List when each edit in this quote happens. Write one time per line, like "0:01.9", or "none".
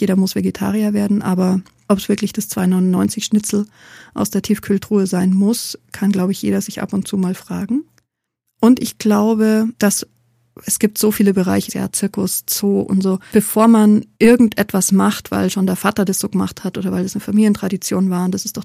0:11.7
0:14.1